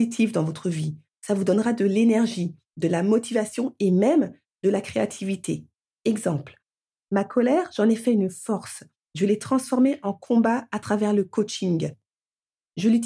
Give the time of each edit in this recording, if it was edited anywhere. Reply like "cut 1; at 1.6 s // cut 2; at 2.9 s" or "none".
none